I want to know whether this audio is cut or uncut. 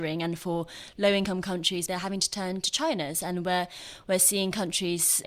cut